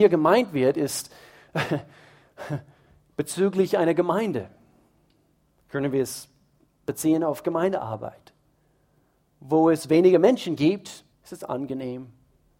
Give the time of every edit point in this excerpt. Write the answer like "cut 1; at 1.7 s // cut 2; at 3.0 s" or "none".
cut 1; at 11.1 s

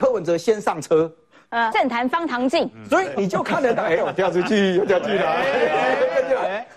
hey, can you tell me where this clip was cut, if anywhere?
cut 1; at 1.7 s // cut 2; at 4.0 s

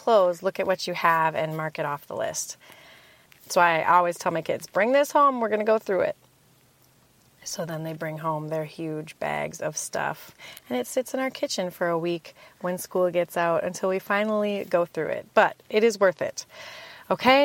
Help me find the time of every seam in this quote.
cut 1; at 3.3 s

